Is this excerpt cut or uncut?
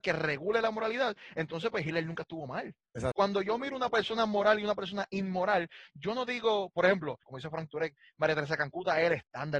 cut